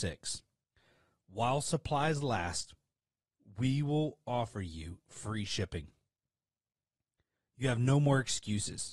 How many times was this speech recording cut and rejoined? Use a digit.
0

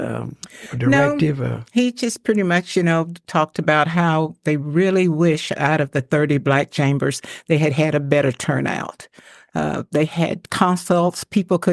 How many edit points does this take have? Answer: 0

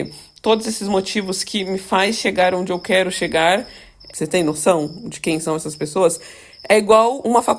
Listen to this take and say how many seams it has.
1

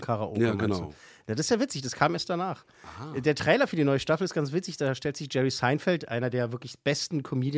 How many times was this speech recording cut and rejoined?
0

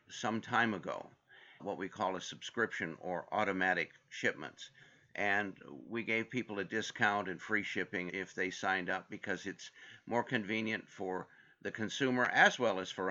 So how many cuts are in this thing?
2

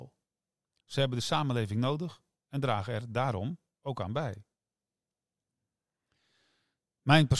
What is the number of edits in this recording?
0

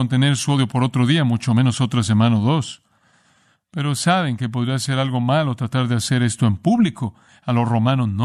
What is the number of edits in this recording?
1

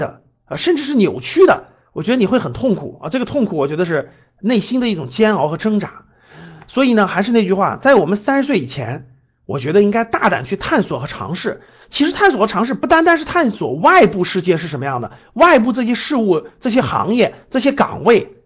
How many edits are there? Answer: 0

